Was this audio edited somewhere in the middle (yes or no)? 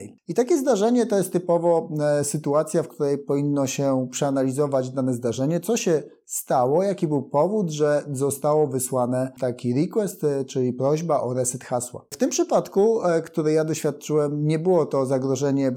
no